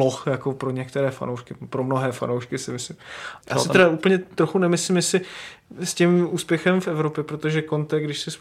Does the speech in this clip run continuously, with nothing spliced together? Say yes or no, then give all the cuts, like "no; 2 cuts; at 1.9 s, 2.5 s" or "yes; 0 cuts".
yes; 0 cuts